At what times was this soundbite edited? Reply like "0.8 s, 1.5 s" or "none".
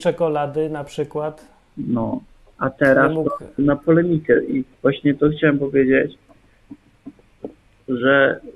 3.6 s, 4.7 s